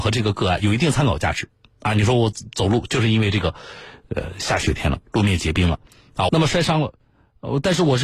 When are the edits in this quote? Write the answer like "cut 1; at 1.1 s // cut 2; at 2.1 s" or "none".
cut 1; at 6.3 s